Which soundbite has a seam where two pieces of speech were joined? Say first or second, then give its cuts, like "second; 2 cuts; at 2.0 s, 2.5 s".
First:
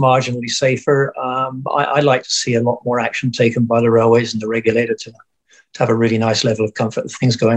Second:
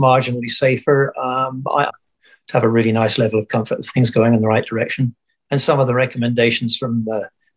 second; 1 cut; at 1.9 s